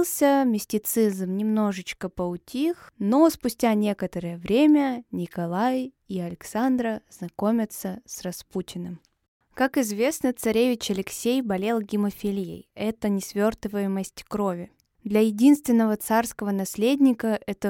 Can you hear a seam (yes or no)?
no